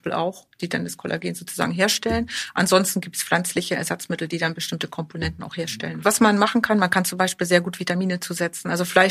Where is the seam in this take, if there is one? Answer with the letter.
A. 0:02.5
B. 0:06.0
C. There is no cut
C